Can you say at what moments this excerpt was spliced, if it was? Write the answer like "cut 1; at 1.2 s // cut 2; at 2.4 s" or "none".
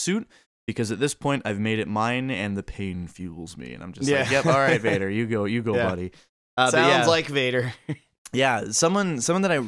none